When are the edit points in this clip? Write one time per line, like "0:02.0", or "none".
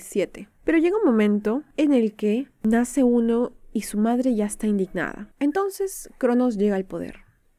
0:05.3